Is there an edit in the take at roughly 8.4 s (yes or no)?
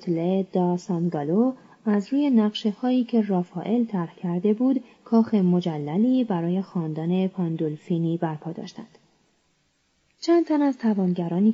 no